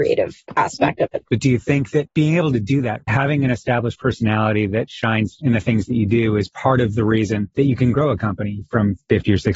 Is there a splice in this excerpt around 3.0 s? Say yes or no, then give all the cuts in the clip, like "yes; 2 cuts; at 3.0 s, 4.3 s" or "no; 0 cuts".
yes; 2 cuts; at 1.3 s, 3.0 s